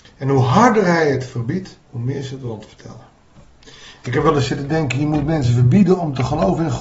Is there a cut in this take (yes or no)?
yes